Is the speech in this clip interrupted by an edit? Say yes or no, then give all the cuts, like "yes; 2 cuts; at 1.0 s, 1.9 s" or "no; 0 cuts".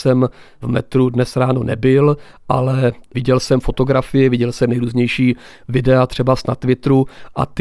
no; 0 cuts